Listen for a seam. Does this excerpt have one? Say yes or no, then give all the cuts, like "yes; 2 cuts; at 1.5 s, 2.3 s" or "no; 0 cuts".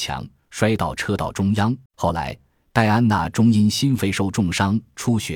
yes; 1 cut; at 1.9 s